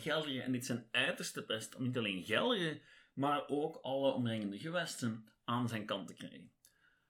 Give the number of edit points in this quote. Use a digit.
0